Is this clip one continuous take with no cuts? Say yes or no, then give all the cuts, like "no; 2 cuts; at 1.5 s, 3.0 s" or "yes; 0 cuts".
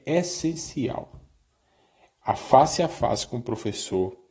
yes; 0 cuts